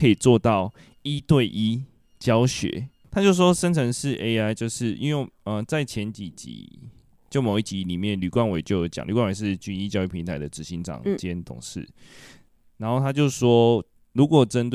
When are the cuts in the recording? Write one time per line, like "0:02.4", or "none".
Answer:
none